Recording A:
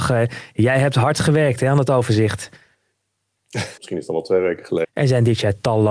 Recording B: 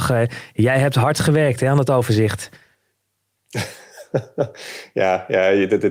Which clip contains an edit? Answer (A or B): A